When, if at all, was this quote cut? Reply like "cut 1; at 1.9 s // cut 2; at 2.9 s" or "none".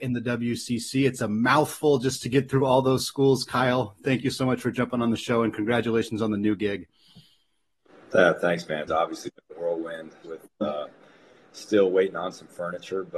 cut 1; at 8.9 s // cut 2; at 10.2 s